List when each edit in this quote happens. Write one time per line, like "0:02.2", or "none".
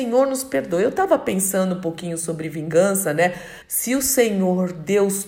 0:03.6